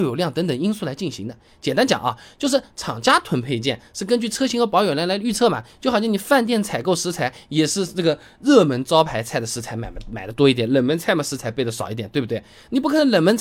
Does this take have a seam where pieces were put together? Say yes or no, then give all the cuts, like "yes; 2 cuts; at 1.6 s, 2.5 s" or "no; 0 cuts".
no; 0 cuts